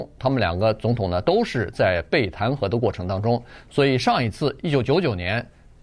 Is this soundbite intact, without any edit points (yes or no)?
yes